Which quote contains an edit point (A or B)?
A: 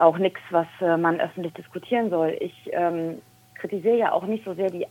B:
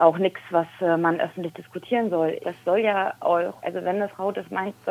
B